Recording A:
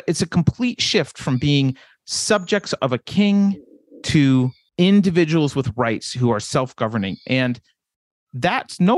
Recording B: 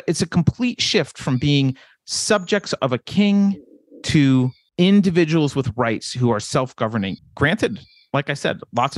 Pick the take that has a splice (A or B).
B